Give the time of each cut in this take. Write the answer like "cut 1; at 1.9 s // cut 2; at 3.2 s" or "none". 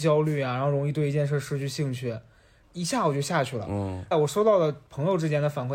cut 1; at 2.6 s // cut 2; at 4.1 s